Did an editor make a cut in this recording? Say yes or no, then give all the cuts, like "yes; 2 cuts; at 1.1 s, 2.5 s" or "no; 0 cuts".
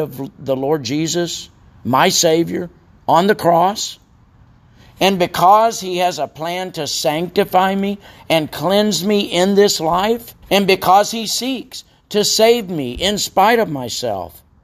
yes; 1 cut; at 10.4 s